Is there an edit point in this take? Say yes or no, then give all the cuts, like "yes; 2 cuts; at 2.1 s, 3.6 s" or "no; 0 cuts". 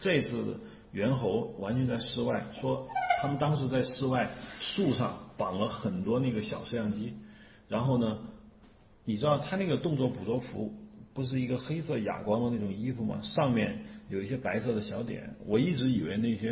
no; 0 cuts